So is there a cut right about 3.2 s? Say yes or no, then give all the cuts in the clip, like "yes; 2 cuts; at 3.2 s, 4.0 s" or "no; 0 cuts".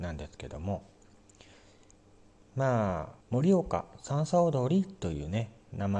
yes; 1 cut; at 3.2 s